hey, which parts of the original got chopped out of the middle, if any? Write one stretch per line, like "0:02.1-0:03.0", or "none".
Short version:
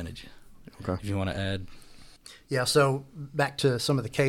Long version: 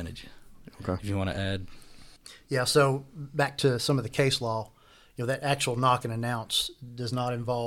none